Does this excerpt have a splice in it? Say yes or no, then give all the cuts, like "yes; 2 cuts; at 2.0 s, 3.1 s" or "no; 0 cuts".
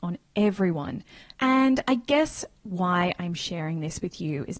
yes; 1 cut; at 1.3 s